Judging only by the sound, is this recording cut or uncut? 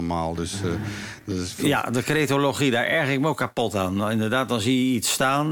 uncut